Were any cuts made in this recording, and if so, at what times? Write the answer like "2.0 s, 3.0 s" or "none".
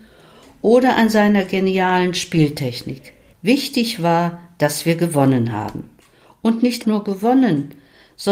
3.3 s, 6.8 s